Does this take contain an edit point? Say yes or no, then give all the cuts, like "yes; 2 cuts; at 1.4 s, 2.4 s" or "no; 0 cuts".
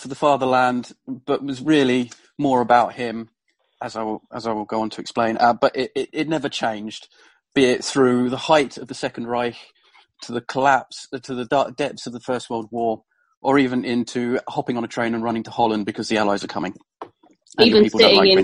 no; 0 cuts